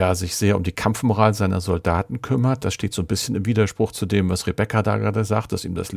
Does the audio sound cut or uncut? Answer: uncut